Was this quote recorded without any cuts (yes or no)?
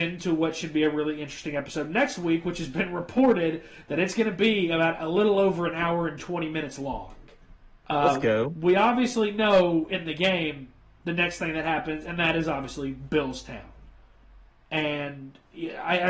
no